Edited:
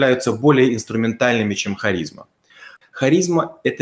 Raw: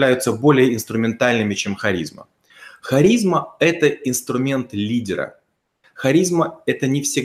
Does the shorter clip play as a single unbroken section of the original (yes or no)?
no